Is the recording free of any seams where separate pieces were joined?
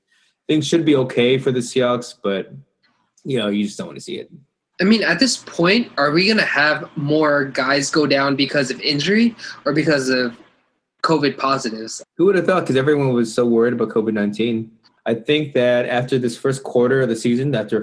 no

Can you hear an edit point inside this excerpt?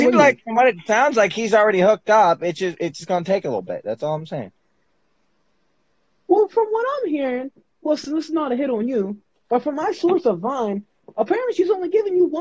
no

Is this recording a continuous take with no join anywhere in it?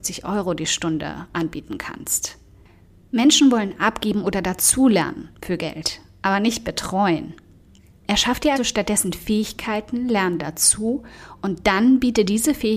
no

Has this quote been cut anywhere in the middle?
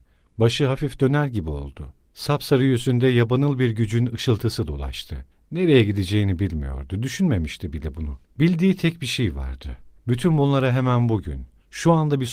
no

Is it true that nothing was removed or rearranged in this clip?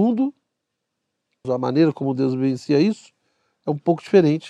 no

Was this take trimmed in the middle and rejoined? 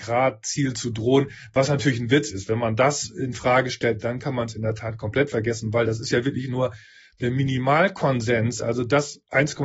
no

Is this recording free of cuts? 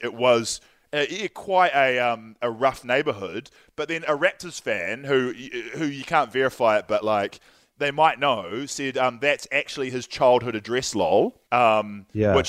no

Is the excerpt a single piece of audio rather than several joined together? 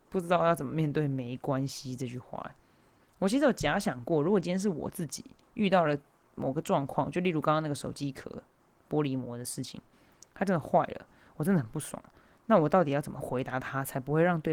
yes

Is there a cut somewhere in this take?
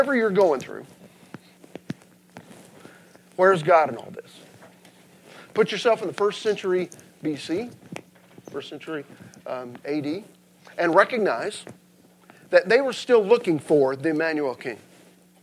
no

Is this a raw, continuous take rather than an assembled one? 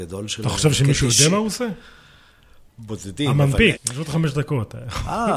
no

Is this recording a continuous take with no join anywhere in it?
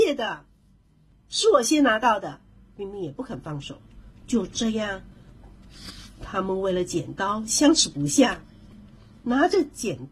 yes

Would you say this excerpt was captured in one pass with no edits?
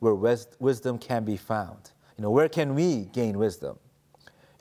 no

